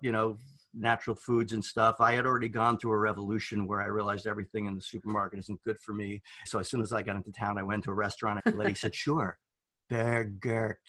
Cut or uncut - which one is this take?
cut